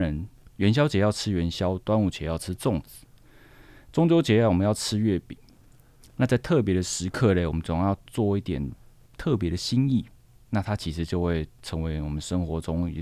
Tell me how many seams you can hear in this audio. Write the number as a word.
zero